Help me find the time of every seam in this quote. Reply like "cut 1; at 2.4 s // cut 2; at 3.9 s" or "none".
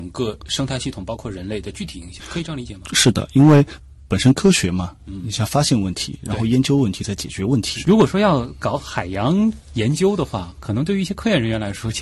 cut 1; at 7.8 s